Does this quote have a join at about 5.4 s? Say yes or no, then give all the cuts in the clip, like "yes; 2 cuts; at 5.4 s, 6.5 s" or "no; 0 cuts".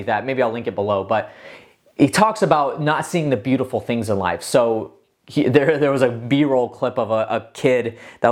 no; 0 cuts